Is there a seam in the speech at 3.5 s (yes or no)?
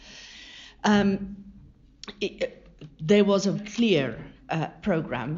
yes